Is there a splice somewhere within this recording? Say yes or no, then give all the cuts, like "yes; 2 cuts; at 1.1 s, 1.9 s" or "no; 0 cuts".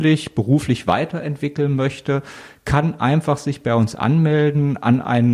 no; 0 cuts